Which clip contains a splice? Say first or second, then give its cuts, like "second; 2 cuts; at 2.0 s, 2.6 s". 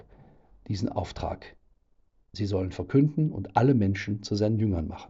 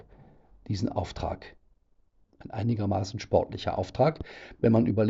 second; 1 cut; at 2.2 s